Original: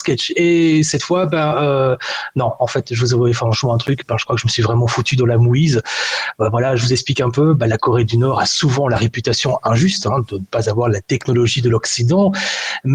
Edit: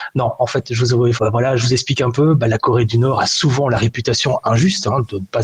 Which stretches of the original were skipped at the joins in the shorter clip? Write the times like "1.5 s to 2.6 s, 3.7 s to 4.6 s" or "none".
3.4 s to 6.3 s